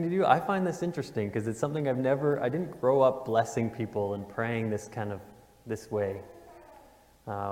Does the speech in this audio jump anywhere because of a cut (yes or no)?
no